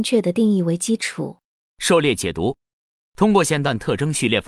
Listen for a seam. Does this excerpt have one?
no; 0 cuts

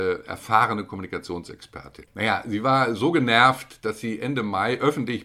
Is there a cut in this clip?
yes; 1 cut; at 2.1 s

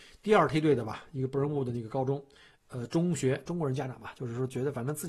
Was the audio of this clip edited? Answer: yes; 1 cut; at 3.5 s

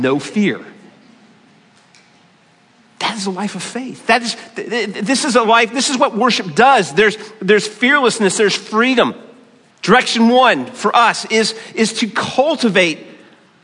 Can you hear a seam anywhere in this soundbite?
yes; 1 cut; at 9.7 s

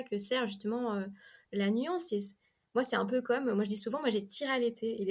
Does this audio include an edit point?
no; 0 cuts

